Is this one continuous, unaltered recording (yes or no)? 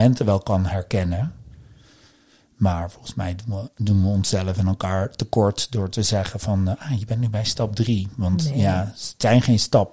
yes